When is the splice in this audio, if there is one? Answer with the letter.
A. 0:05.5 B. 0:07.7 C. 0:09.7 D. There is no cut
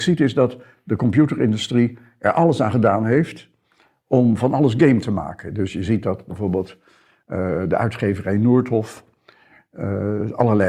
D